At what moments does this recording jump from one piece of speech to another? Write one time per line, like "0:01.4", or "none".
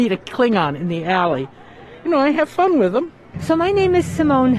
0:03.3